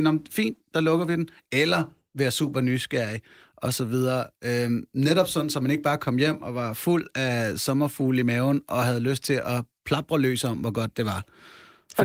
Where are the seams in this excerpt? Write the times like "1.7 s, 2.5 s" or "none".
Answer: none